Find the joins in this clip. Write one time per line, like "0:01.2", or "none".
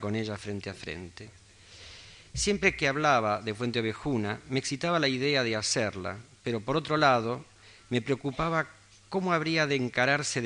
none